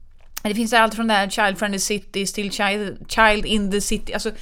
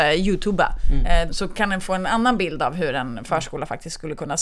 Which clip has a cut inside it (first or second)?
second